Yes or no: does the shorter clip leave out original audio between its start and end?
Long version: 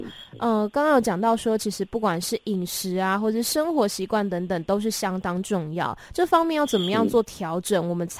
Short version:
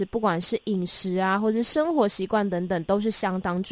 no